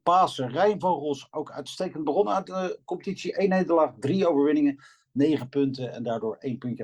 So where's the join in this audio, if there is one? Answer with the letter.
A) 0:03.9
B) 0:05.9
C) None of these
C